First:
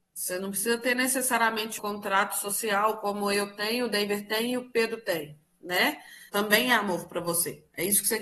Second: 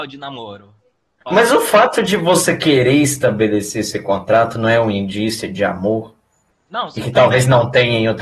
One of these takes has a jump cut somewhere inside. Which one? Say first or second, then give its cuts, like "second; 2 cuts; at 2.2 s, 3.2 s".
first; 2 cuts; at 1.8 s, 6.3 s